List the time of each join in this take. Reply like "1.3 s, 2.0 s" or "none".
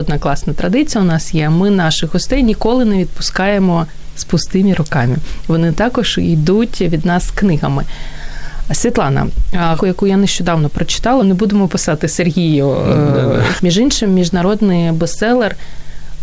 9.8 s, 11.2 s, 13.6 s